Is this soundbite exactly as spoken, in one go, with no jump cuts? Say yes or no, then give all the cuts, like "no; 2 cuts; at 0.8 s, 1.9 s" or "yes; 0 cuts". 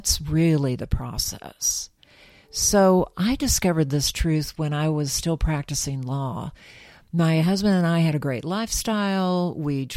yes; 0 cuts